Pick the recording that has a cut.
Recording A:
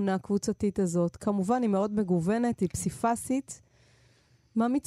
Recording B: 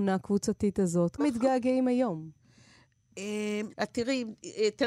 B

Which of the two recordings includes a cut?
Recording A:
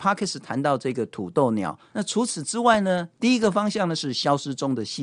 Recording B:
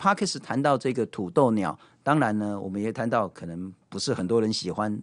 A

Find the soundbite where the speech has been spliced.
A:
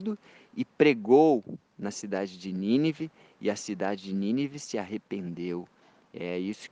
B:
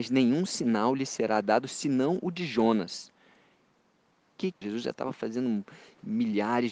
B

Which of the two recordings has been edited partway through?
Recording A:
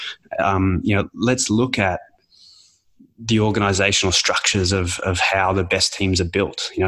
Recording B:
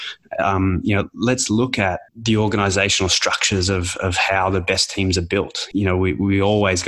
B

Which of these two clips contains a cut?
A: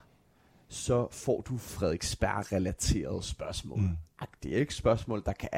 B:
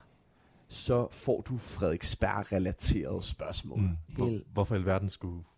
B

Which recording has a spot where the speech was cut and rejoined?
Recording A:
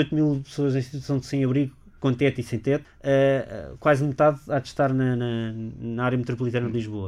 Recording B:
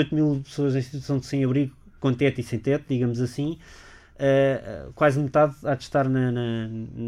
A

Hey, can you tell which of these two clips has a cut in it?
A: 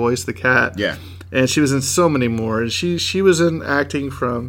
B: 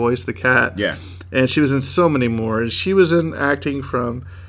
B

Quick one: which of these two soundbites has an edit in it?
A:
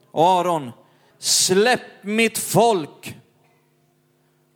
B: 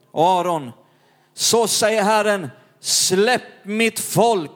A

